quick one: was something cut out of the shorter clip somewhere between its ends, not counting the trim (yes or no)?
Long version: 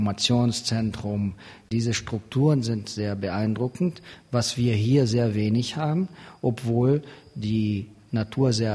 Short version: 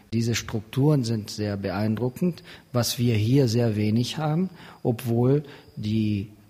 no